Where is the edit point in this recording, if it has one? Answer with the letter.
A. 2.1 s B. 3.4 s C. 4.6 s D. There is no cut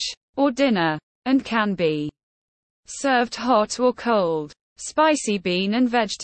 C